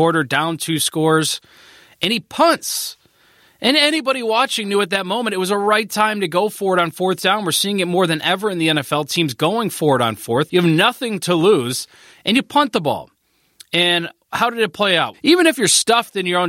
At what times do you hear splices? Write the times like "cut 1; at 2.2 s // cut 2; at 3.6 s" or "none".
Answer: cut 1; at 10.5 s // cut 2; at 15.1 s